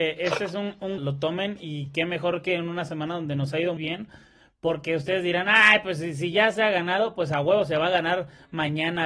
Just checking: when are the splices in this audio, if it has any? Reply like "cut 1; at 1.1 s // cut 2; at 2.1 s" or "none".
cut 1; at 1.0 s // cut 2; at 3.8 s